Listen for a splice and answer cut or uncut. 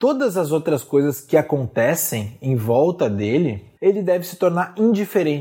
cut